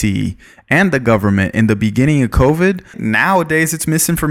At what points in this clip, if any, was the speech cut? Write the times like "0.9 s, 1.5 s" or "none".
2.9 s

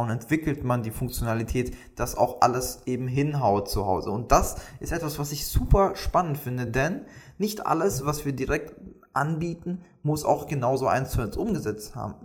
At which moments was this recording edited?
none

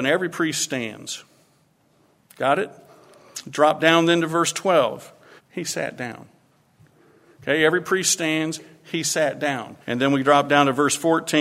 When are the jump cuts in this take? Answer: 5.4 s, 9.8 s

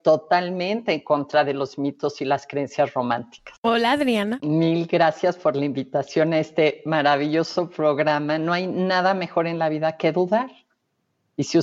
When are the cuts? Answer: 3.6 s

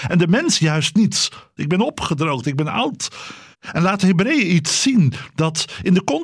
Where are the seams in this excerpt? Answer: 1.6 s, 3.5 s

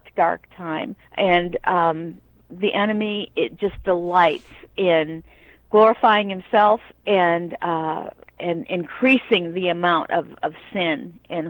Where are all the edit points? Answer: 1.0 s

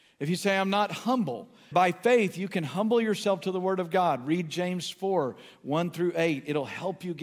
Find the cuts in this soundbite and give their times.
1.7 s

